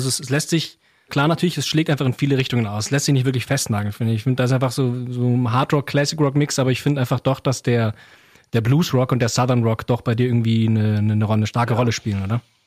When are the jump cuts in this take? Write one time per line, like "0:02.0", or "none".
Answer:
0:01.1